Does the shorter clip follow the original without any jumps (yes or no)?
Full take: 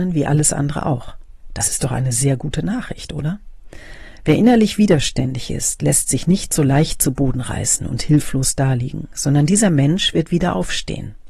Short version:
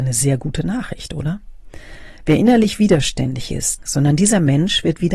no